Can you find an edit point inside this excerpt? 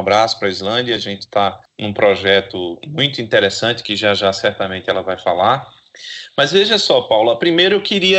no; 0 cuts

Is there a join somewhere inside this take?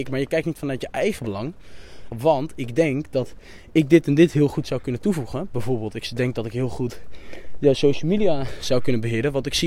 yes; 1 cut; at 2.1 s

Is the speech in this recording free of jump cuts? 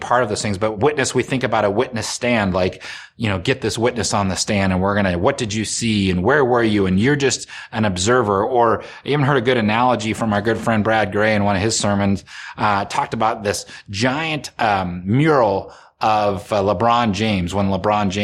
yes; 0 cuts

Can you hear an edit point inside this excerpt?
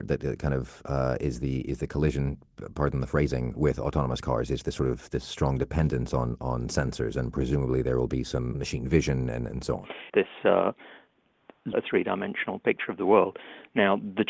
yes; 2 cuts; at 10.1 s, 11.7 s

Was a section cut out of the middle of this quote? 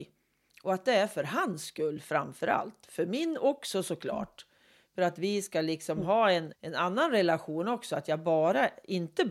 yes; 1 cut; at 6.5 s

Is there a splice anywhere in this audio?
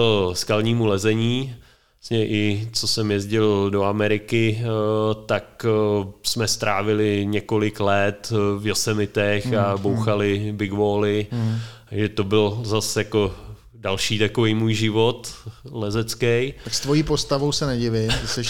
no; 0 cuts

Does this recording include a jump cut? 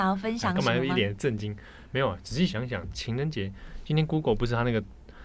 no; 0 cuts

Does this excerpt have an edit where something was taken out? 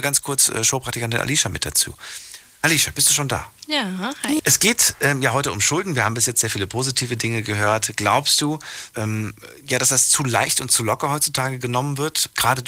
yes; 2 cuts; at 4.4 s, 8.9 s

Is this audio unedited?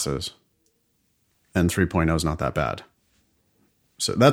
yes; 0 cuts

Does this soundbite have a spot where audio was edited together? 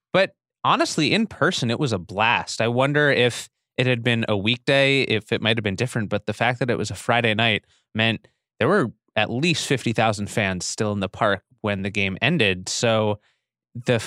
no; 0 cuts

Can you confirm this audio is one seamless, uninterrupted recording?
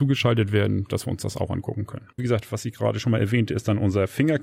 no; 1 cut; at 2.2 s

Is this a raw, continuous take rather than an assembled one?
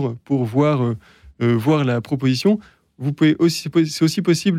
yes; 0 cuts

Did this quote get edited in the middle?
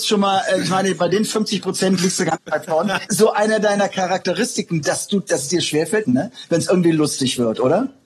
yes; 2 cuts; at 3.1 s, 6.0 s

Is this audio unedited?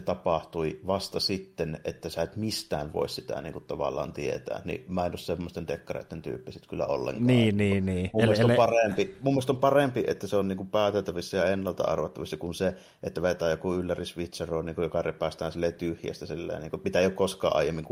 yes; 0 cuts

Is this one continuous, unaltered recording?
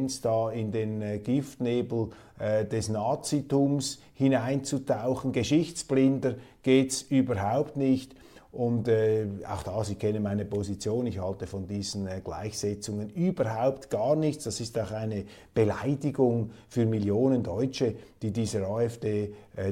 yes; 0 cuts

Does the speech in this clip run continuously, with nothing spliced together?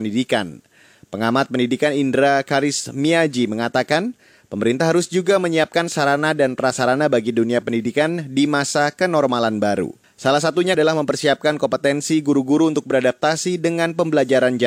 no; 1 cut; at 10.7 s

